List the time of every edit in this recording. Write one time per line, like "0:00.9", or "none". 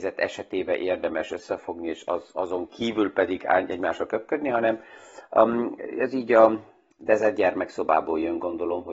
none